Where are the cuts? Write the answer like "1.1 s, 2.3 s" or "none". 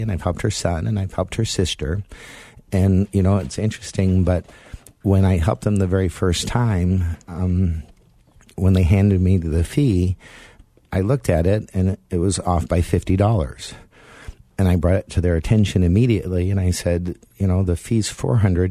none